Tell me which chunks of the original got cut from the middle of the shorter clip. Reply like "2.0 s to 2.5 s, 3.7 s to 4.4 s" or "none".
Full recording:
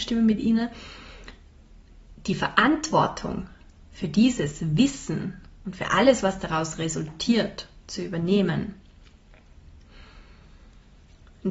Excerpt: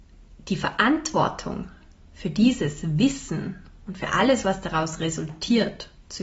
none